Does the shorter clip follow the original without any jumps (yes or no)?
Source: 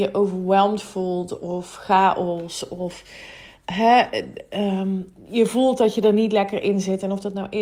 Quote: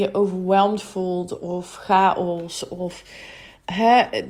yes